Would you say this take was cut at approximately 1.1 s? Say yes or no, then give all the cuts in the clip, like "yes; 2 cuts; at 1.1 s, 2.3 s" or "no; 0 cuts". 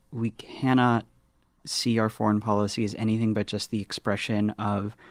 no; 0 cuts